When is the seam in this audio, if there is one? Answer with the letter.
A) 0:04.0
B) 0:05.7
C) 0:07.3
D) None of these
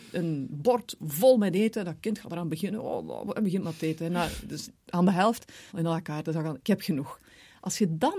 B